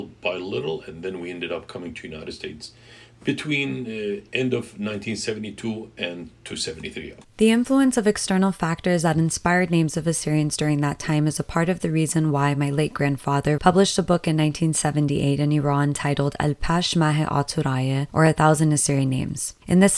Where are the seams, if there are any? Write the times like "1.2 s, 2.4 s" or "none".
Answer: 7.2 s, 13.6 s